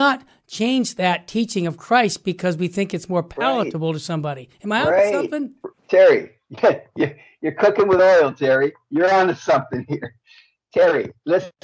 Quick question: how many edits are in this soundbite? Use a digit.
1